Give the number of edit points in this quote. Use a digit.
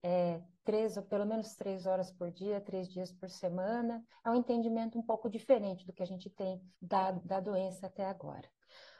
2